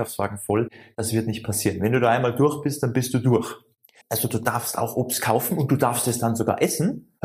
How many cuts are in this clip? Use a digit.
1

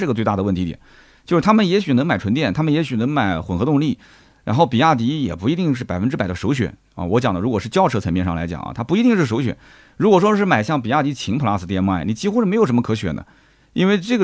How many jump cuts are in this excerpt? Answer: 0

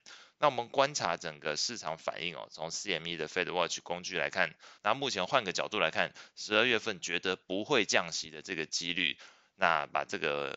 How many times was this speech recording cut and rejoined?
1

